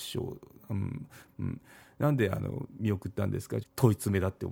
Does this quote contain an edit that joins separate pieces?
yes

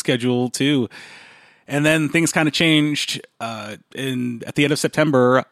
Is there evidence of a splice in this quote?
no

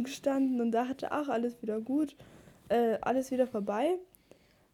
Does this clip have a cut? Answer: no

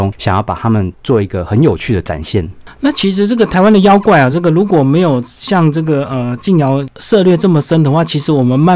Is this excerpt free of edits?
yes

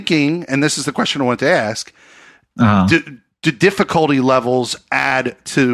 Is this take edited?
no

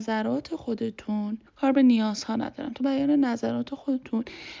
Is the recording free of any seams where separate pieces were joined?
no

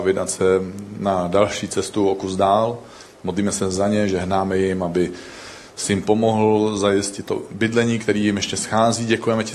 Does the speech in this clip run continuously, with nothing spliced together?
yes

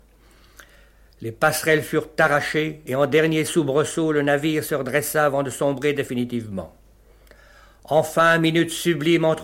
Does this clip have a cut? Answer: yes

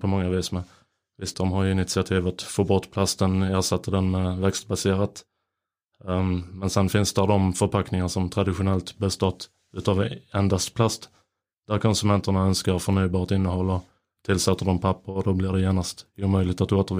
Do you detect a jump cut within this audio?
yes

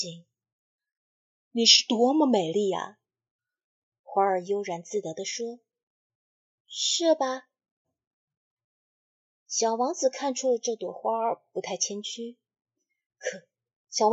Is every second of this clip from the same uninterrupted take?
no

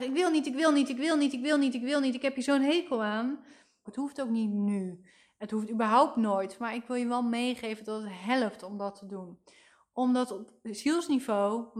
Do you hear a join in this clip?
yes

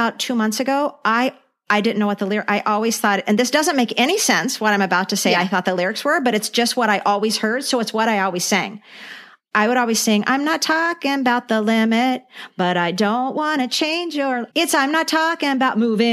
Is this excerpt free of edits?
no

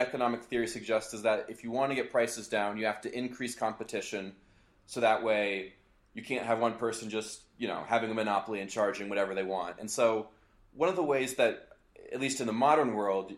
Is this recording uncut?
yes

